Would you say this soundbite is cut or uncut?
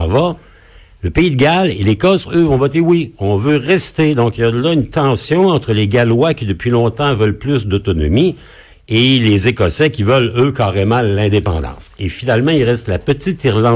uncut